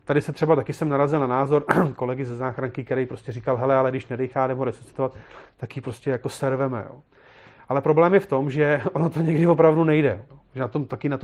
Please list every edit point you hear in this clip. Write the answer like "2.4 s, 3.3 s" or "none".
10.3 s

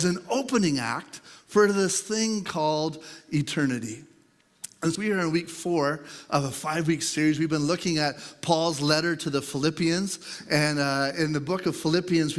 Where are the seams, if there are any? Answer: 4.9 s

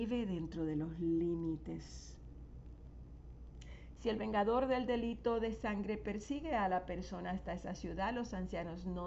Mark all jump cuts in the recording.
4.0 s

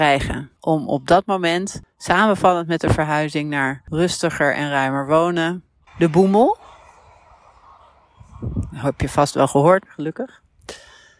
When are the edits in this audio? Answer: 5.9 s, 9.9 s

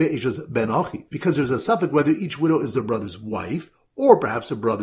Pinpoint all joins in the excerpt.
1.1 s

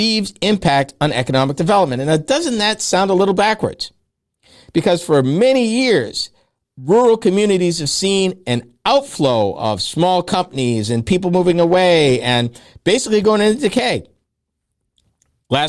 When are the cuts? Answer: none

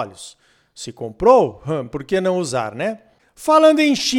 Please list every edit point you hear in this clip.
none

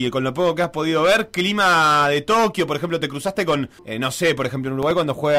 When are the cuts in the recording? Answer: 3.8 s

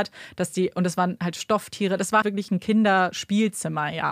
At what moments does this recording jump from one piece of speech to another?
2.2 s

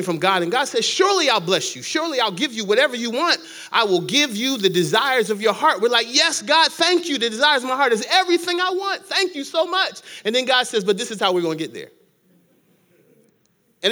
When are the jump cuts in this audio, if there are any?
none

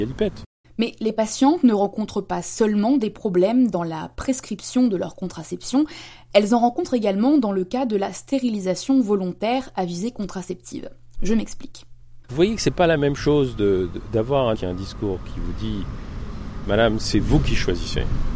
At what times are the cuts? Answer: 12.3 s, 14.5 s

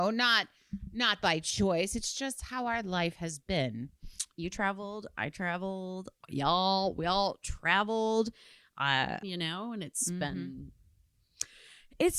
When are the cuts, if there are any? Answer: 9.2 s

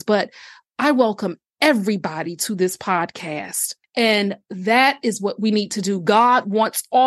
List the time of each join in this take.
3.8 s

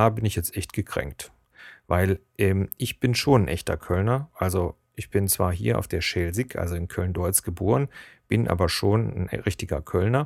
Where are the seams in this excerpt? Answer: none

